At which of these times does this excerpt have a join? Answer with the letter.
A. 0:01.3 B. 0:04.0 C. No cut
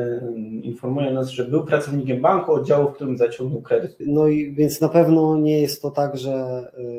B